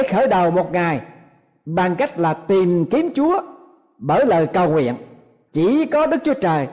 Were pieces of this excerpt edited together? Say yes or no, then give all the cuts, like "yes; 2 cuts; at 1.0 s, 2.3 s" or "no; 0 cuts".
yes; 1 cut; at 5.5 s